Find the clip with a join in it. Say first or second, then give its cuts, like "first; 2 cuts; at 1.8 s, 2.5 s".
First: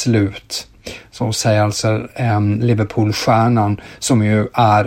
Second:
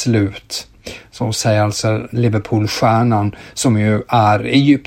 second; 1 cut; at 2.1 s